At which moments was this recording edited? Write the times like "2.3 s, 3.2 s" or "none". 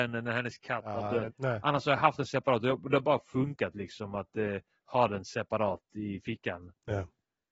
1.3 s